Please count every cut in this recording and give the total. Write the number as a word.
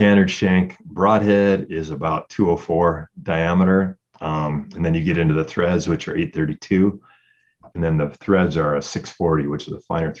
one